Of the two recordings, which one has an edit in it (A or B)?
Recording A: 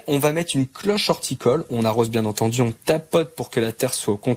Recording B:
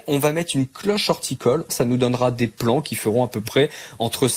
B